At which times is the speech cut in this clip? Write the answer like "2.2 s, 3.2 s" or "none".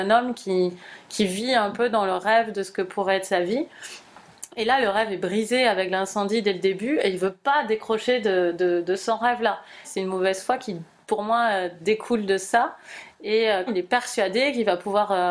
9.8 s, 13.7 s

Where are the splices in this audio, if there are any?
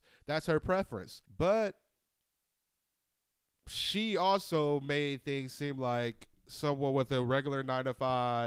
1.3 s

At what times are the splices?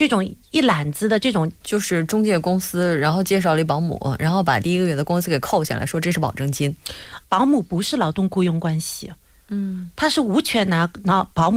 1.6 s, 7.2 s

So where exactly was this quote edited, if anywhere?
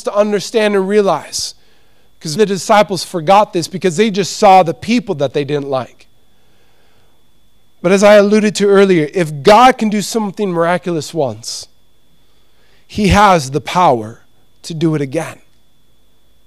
2.4 s

